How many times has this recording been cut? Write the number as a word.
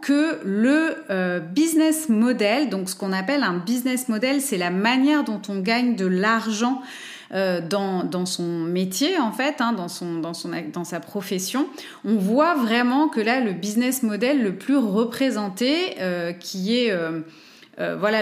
zero